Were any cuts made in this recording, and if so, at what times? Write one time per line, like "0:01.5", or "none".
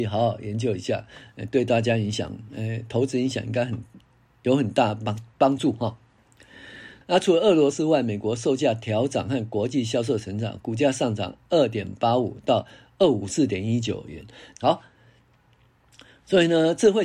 0:07.0
0:14.6